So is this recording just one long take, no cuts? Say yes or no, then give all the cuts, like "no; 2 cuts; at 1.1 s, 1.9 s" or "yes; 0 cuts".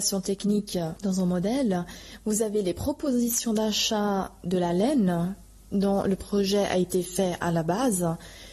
yes; 0 cuts